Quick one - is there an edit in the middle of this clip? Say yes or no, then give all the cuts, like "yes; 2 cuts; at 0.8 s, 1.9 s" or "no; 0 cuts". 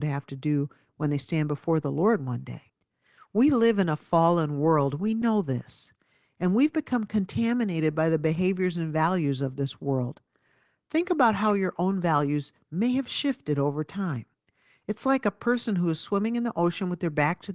no; 0 cuts